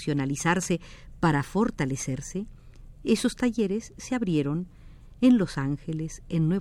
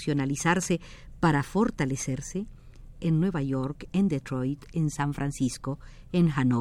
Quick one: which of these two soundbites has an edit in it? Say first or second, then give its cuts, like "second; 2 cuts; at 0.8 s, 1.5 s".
second; 2 cuts; at 2.9 s, 4.7 s